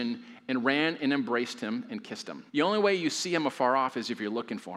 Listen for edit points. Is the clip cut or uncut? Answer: cut